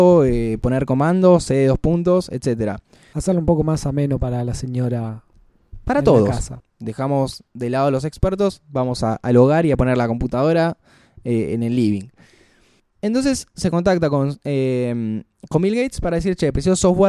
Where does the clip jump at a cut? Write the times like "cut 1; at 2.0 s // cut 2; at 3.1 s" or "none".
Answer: cut 1; at 6.6 s